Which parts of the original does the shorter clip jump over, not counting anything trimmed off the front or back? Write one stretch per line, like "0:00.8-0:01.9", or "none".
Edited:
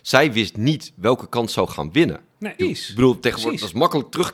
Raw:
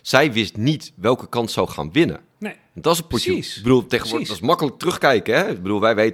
0:02.6-0:03.3